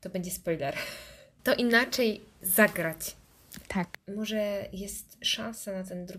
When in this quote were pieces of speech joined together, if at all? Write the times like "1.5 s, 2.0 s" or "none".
1.4 s

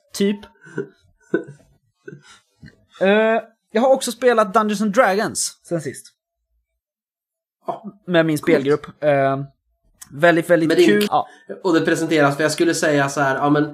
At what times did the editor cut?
11.1 s

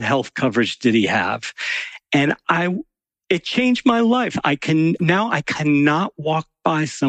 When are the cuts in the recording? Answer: 5.0 s

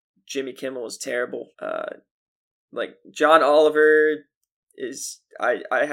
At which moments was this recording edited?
1.5 s

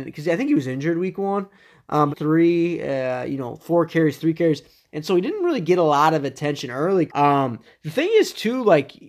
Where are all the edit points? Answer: 2.1 s, 7.1 s

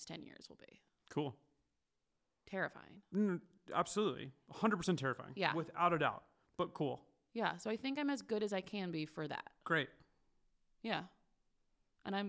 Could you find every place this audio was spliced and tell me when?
none

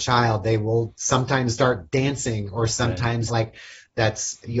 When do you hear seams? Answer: 3.3 s

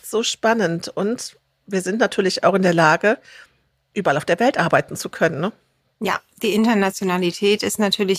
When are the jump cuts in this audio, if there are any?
none

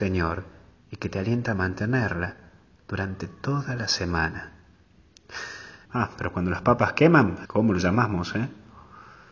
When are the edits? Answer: 5.8 s, 7.4 s

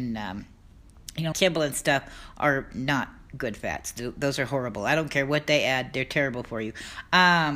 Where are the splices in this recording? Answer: 1.3 s

